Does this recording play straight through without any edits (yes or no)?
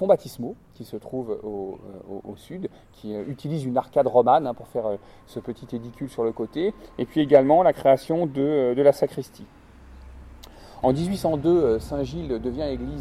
no